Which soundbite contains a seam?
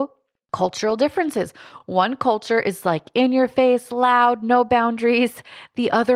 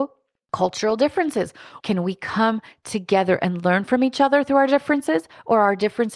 second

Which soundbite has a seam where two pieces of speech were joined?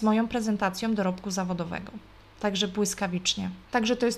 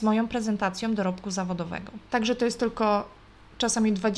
second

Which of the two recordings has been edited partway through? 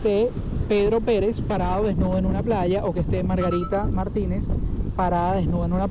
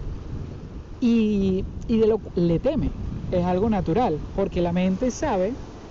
second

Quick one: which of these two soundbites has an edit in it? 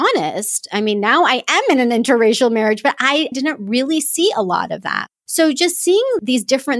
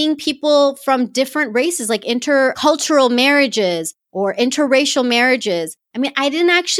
first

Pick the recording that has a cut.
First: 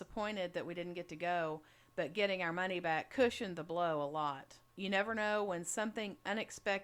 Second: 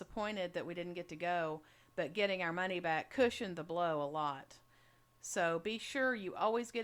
first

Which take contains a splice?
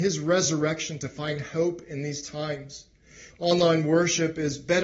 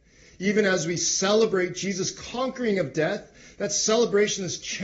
first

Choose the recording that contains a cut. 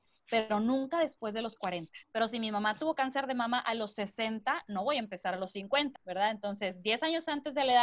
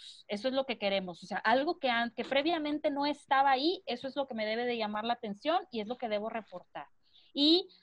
first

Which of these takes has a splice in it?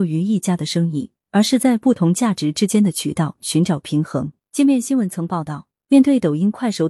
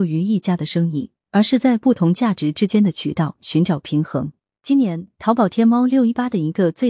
first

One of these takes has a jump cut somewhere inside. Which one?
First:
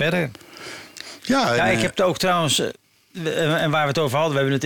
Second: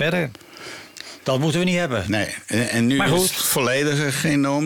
second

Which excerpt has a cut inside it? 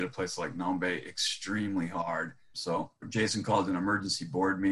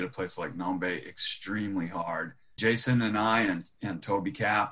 first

